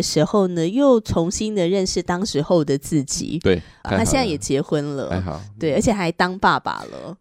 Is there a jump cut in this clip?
yes; 1 cut; at 3.8 s

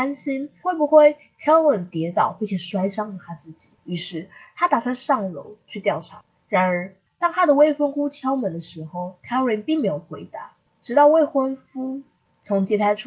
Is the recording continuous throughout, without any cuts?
yes; 0 cuts

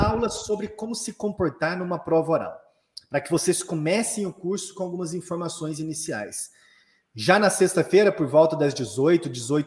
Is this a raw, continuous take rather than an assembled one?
yes; 0 cuts

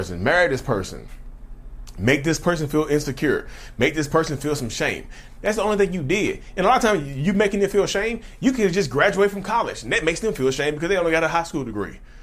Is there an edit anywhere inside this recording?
no; 0 cuts

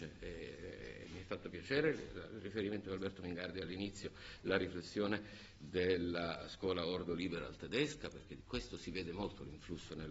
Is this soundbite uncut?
yes; 0 cuts

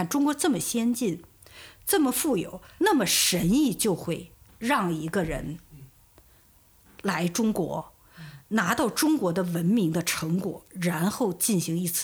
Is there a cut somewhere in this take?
yes; 1 cut; at 2.8 s

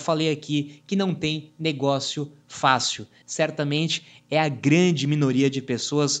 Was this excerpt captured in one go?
no; 1 cut; at 3.2 s

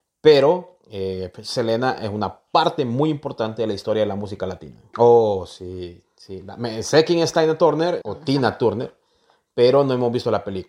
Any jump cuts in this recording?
yes; 2 cuts; at 4.9 s, 8.0 s

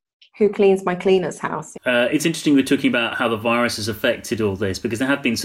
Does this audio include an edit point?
yes; 1 cut; at 1.7 s

